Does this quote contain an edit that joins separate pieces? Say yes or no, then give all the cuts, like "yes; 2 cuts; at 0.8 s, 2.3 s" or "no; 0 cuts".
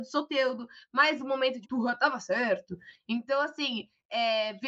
yes; 1 cut; at 1.6 s